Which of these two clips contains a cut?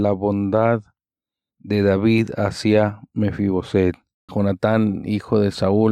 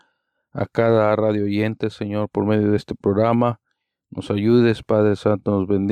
first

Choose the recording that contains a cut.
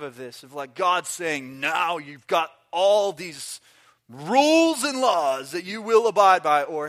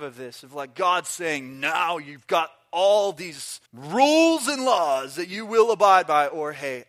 second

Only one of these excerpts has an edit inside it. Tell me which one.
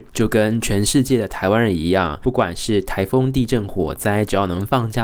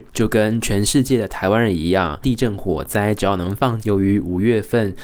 second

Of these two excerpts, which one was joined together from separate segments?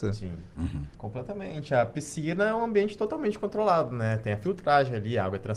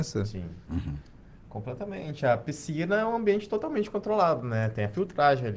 first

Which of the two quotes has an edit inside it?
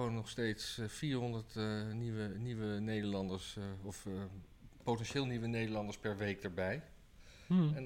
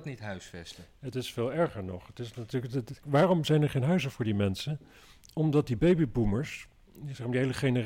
second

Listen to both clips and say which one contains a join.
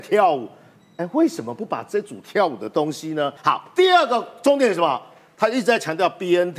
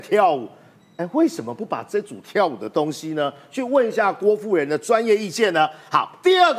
first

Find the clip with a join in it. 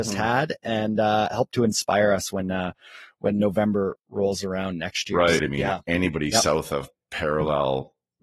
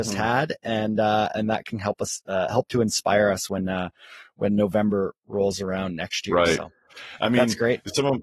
first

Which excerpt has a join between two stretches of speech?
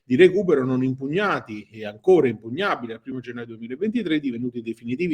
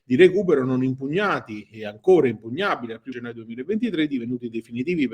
second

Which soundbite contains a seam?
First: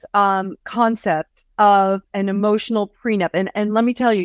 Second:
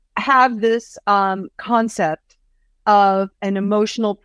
first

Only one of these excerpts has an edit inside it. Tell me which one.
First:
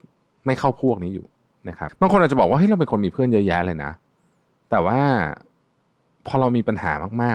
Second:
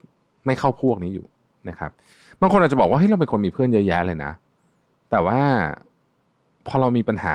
first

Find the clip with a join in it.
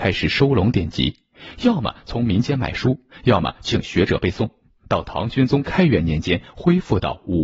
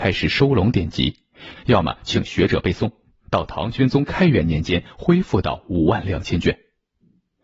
second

